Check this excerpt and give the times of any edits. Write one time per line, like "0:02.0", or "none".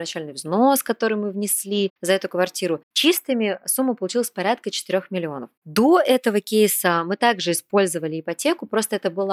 none